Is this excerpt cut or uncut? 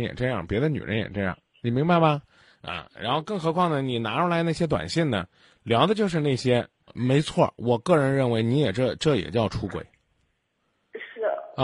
cut